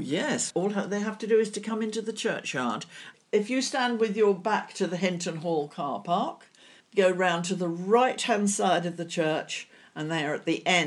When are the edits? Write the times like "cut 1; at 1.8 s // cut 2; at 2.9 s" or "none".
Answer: cut 1; at 6.8 s